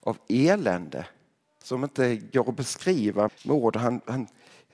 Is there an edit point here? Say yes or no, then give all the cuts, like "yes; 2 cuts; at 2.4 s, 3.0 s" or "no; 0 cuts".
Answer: yes; 1 cut; at 3.3 s